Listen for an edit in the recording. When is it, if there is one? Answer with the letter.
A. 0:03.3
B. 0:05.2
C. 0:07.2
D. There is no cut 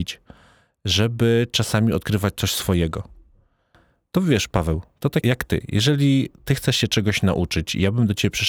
B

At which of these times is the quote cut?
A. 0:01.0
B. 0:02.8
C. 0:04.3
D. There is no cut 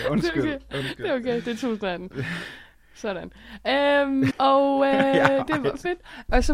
C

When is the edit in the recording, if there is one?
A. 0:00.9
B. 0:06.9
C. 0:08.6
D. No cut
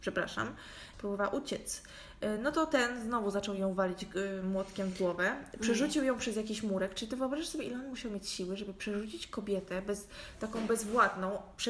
A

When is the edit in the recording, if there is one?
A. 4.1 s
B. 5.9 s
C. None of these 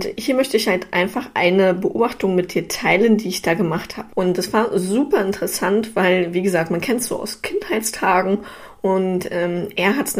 A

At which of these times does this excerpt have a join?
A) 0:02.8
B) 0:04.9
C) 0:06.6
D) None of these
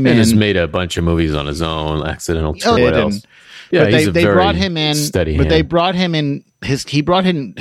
A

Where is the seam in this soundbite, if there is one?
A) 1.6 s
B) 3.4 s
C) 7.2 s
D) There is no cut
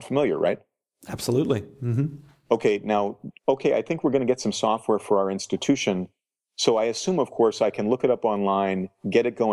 B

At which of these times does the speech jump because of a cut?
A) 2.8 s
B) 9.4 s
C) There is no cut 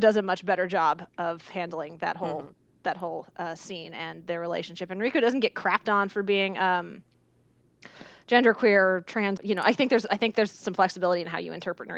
B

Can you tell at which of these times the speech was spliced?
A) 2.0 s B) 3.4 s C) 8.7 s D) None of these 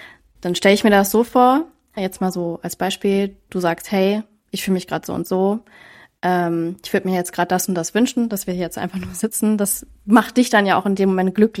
A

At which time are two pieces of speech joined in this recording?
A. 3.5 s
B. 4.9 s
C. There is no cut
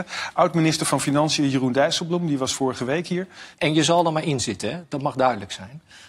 A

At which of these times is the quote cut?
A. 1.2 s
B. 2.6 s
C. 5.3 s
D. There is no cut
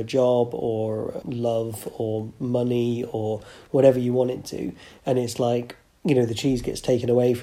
A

